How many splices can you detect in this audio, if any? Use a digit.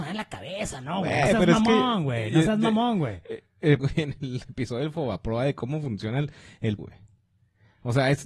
2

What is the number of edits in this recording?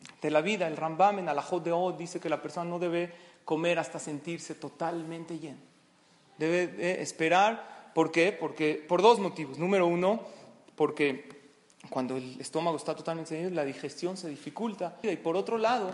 1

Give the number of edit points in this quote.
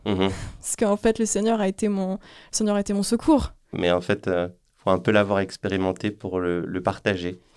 1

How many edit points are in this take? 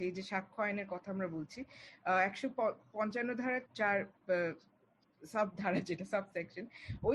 1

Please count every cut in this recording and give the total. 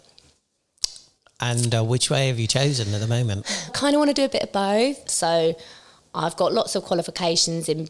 2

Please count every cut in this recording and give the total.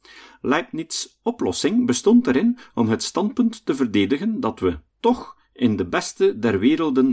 1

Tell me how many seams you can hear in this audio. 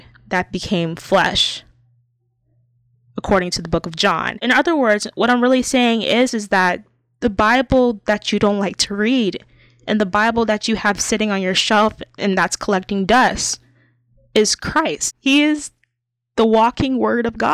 0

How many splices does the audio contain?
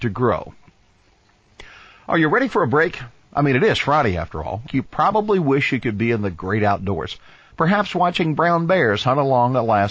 1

